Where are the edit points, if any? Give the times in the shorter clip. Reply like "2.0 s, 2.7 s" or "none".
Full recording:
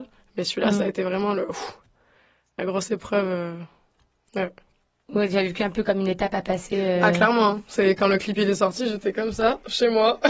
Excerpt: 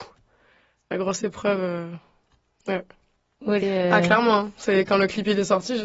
3.6 s

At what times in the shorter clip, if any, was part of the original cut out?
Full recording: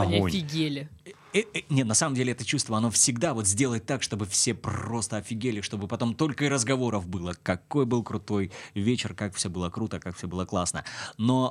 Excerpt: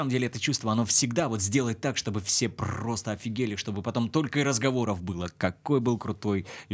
none

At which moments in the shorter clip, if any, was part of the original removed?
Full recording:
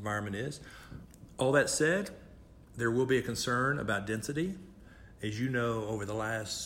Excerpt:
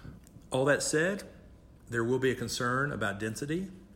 none

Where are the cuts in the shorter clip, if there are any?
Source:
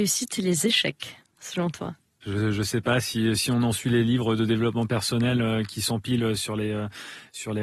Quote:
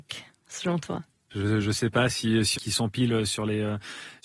2.5 s

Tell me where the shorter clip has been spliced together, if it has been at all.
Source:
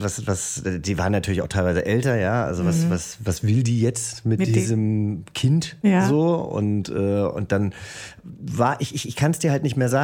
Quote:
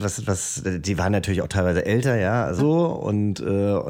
2.6 s

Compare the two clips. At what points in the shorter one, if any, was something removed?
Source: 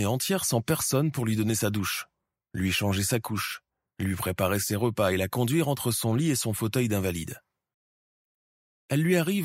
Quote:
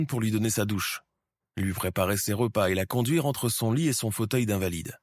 1.4 s

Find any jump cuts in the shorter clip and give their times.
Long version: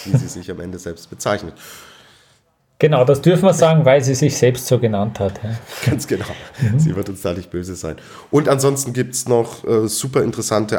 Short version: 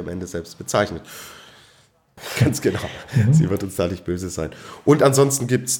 2.2 s

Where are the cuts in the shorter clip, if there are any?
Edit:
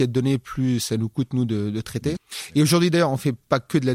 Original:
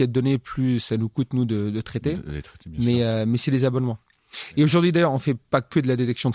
2.2 s

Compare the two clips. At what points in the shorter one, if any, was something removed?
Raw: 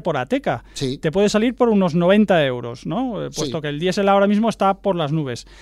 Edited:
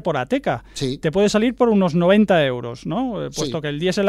none

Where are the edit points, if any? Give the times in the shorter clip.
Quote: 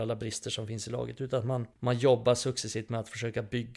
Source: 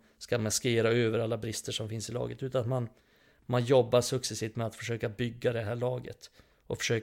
1.7 s

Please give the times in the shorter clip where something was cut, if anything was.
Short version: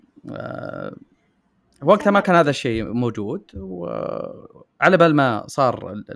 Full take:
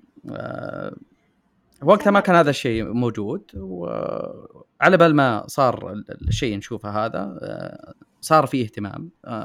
none

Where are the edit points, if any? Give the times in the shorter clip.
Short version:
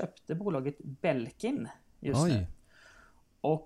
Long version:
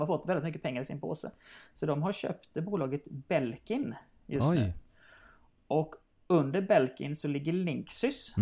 none

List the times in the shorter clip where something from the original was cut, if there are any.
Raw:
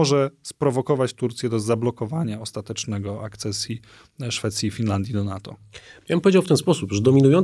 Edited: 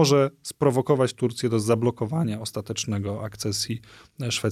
none

